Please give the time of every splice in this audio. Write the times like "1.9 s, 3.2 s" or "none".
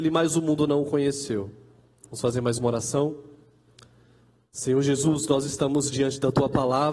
2.0 s